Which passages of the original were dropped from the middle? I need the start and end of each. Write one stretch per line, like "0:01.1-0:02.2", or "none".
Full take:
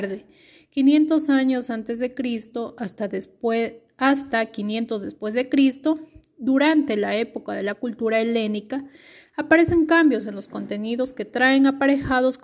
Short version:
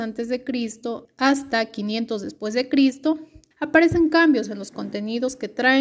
0:02.8-0:03.9
0:06.3-0:09.3